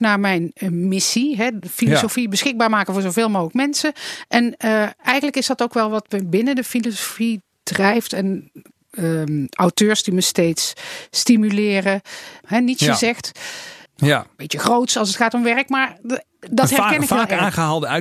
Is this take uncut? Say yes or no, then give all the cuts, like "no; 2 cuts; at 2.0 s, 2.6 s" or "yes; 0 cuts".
no; 2 cuts; at 12.4 s, 13.8 s